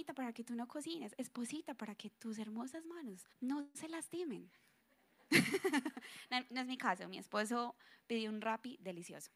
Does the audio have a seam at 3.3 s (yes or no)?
yes